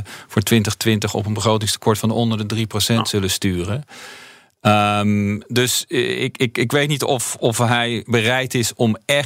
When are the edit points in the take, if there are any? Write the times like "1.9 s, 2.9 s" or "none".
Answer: none